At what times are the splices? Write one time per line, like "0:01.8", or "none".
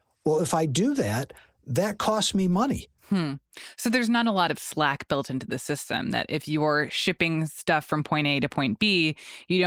0:03.0